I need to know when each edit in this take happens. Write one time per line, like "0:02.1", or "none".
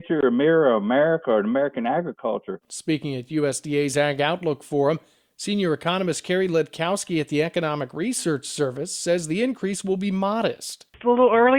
0:02.6